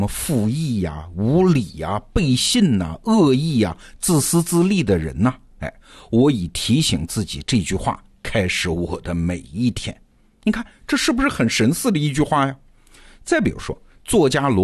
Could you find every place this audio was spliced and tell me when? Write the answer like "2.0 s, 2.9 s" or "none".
none